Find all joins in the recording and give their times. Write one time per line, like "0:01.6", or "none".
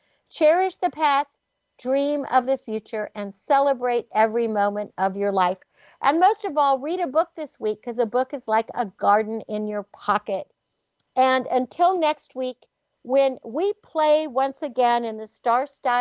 none